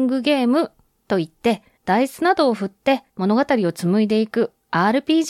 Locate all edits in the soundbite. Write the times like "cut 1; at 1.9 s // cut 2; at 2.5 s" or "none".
cut 1; at 1.8 s // cut 2; at 3.1 s